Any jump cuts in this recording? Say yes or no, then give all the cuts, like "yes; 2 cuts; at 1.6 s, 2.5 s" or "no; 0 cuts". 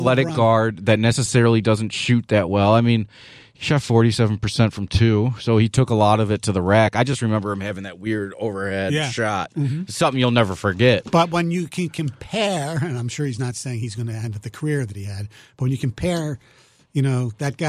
no; 0 cuts